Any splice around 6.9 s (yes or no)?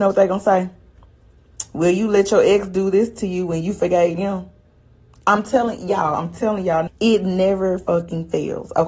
yes